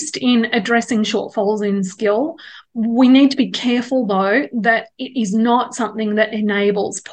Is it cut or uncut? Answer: uncut